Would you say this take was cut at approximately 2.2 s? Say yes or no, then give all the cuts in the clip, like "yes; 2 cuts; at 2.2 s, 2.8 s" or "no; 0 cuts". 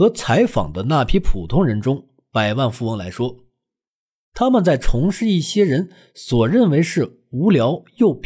no; 0 cuts